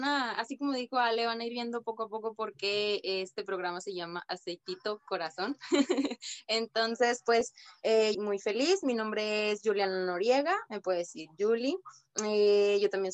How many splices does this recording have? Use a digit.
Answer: 1